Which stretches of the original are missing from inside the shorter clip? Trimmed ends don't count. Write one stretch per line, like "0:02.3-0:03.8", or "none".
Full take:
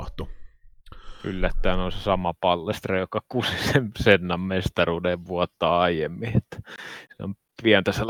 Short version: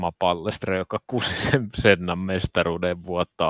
none